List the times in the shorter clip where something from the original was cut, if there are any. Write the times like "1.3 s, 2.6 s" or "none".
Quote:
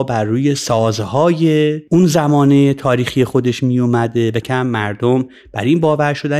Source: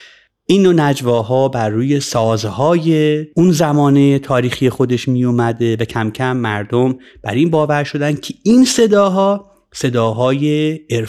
4.4 s

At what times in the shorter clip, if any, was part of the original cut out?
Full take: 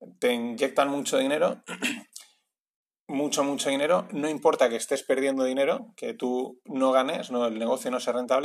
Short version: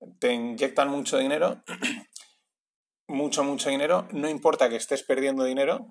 none

